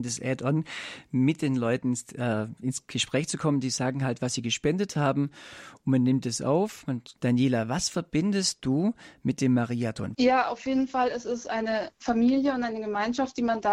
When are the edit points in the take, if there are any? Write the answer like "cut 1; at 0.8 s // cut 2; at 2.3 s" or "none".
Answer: cut 1; at 7.2 s // cut 2; at 10.1 s